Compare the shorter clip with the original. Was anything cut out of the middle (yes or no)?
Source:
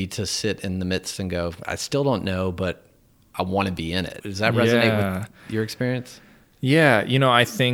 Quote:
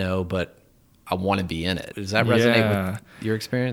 no